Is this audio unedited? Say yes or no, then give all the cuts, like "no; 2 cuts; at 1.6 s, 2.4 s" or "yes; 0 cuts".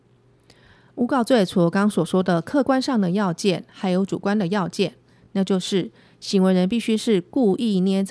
yes; 0 cuts